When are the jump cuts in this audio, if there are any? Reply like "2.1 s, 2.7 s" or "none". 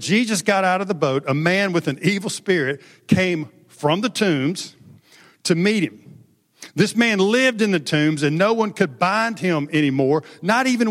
none